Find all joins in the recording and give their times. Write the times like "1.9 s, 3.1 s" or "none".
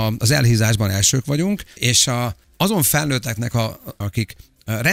1.8 s, 4.0 s